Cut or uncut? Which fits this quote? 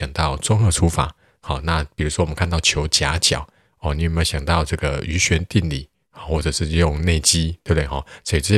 uncut